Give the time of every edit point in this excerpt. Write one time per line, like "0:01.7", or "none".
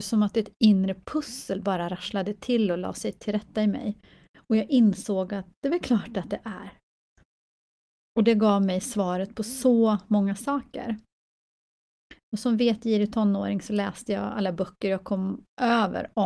none